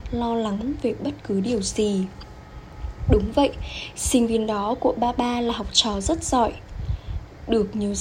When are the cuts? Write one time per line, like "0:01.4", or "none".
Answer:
none